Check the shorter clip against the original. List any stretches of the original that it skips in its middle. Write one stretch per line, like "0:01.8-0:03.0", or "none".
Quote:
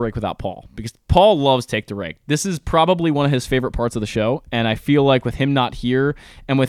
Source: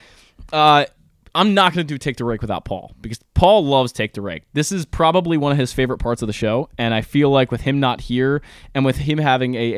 none